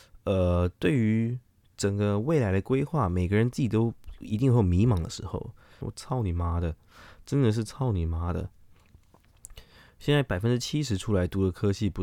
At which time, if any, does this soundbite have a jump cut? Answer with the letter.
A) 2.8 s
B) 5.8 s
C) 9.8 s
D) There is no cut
B